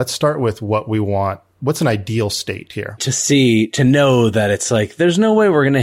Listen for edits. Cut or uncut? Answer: cut